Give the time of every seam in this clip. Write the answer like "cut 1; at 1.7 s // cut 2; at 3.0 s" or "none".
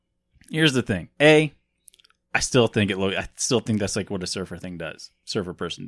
none